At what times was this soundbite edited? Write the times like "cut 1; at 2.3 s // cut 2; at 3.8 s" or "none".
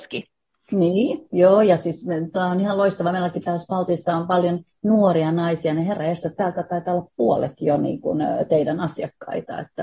none